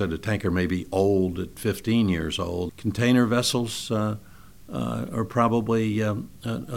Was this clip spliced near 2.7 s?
yes; 1 cut; at 2.7 s

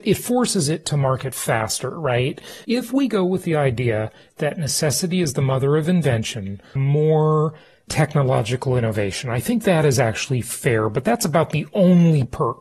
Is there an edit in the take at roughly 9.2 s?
no; 2 cuts; at 2.6 s, 6.8 s

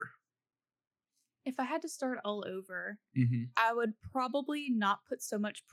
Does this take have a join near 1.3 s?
no; 0 cuts

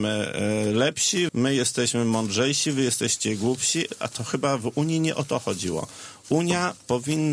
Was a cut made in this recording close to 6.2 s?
no; 1 cut; at 1.3 s

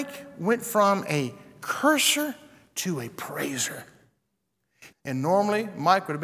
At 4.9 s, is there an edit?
yes; 1 cut; at 4.9 s

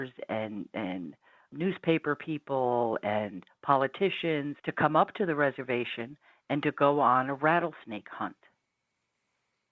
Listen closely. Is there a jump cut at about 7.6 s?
no; 2 cuts; at 1.5 s, 4.6 s

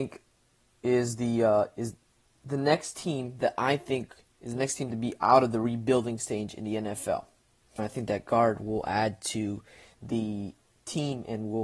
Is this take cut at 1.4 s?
no; 1 cut; at 7.8 s

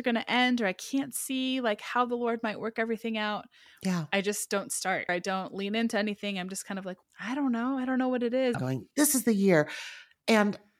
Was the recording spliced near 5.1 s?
yes; 3 cuts; at 5.1 s, 7.0 s, 8.5 s

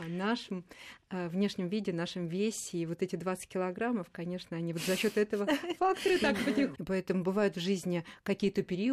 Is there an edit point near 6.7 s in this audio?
yes; 1 cut; at 6.7 s

